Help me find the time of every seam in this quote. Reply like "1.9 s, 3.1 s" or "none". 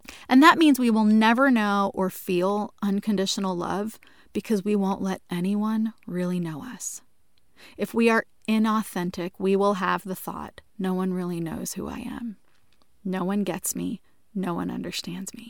10.7 s